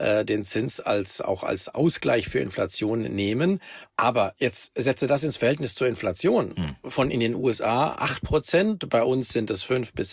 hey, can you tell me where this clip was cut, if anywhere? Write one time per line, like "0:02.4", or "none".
0:03.9

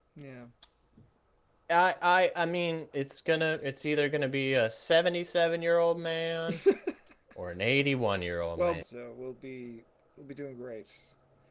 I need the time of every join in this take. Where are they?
0:02.9
0:08.8

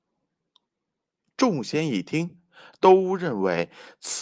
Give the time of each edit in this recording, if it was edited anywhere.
none

